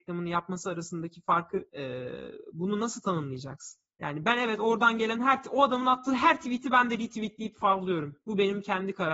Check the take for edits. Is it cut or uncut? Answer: cut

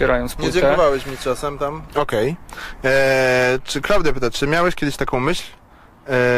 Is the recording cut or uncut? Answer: cut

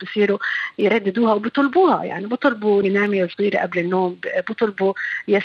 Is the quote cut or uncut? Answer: cut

